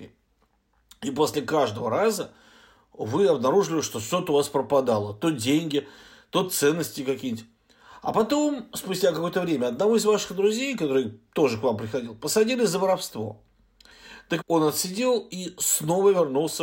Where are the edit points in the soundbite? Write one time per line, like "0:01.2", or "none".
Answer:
0:14.4